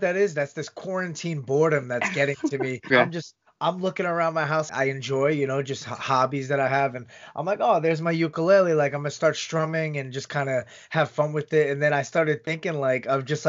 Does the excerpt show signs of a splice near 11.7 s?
no; 2 cuts; at 2.9 s, 4.7 s

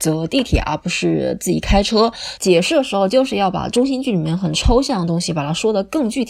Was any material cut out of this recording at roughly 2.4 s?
yes; 1 cut; at 2.4 s

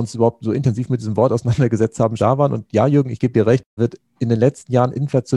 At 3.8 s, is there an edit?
yes; 2 cuts; at 2.2 s, 3.8 s

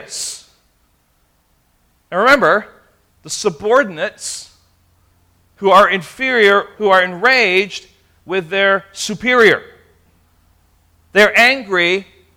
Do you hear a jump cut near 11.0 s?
no; 2 cuts; at 3.1 s, 6.7 s

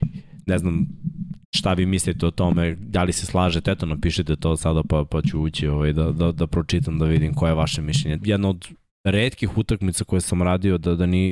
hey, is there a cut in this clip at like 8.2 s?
yes; 1 cut; at 8.2 s

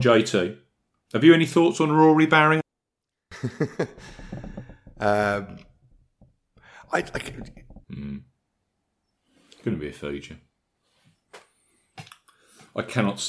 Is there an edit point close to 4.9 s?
no; 2 cuts; at 2.6 s, 7.8 s

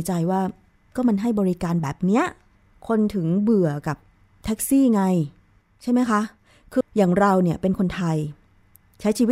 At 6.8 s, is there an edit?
yes; 1 cut; at 6.8 s

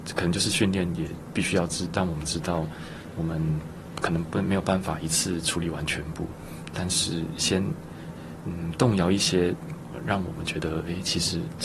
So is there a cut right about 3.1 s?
yes; 1 cut; at 3.1 s

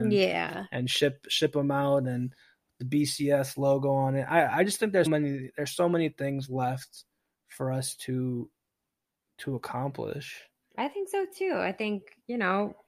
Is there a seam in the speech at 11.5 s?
no; 1 cut; at 5.1 s

